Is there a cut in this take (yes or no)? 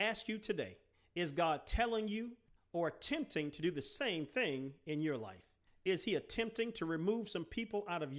no